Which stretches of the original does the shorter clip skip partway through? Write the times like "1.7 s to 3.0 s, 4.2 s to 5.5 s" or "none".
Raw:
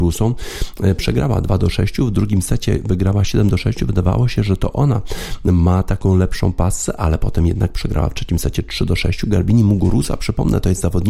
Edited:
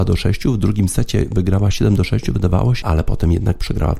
4.4 s to 7.0 s